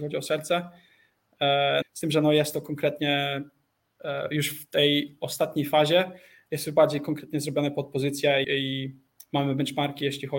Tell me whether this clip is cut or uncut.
cut